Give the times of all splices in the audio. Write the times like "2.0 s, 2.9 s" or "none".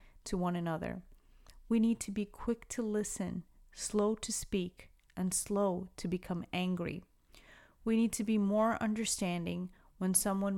none